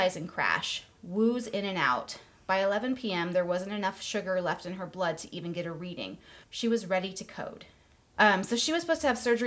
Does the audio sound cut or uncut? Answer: cut